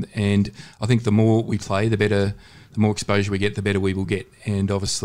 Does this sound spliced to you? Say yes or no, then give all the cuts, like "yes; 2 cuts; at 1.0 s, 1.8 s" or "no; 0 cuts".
no; 0 cuts